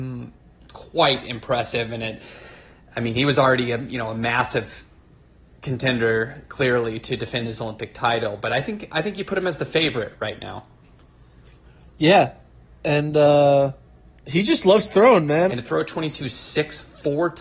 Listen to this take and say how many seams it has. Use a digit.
1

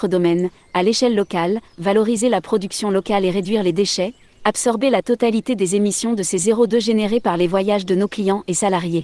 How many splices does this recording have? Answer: 2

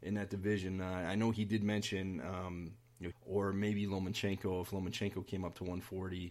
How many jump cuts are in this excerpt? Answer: 1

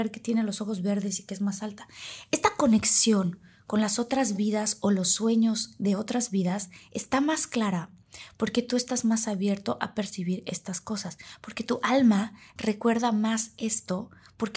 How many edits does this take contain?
0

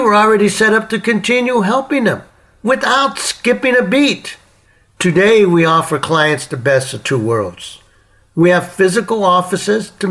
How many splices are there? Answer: 0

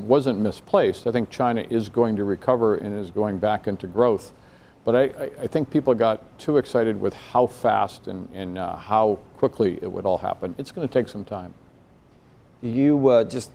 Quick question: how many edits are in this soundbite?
0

